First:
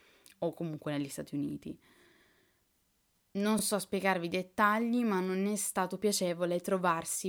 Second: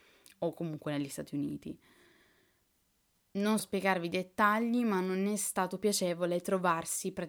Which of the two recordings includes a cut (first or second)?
second